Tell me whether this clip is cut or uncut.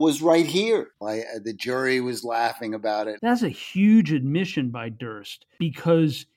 cut